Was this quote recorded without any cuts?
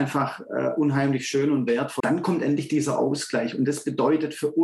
no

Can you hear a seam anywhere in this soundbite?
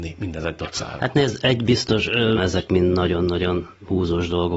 yes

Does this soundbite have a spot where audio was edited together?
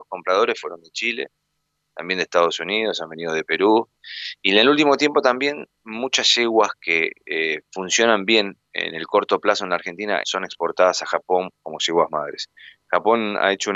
yes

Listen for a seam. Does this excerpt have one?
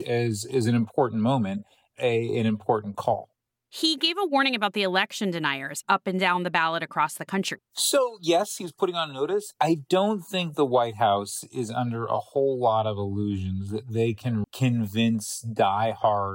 yes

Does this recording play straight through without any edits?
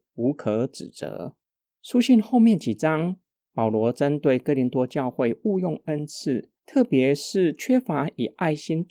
no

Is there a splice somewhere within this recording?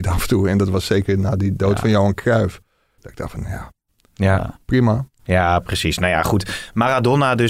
yes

